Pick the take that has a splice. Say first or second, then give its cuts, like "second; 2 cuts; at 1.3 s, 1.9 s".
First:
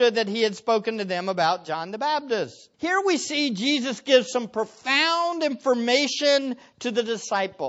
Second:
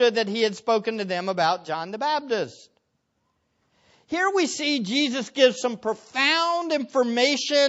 first; 1 cut; at 2.7 s